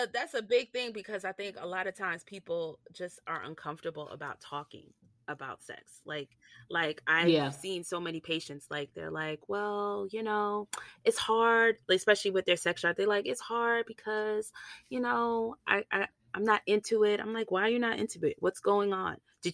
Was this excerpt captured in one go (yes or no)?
yes